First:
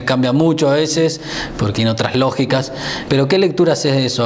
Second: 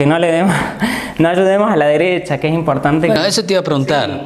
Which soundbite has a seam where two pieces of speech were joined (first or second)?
first